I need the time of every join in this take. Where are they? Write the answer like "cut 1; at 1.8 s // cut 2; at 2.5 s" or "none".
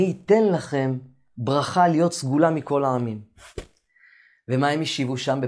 none